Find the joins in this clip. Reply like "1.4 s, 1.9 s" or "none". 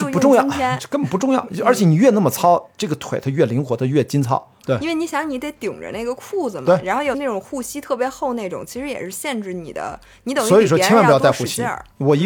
4.6 s, 7.1 s